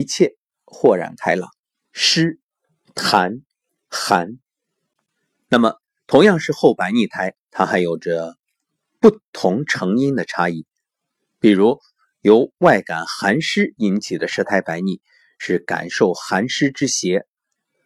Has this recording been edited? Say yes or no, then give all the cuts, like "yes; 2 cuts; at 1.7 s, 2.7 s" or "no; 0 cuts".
yes; 1 cut; at 1.9 s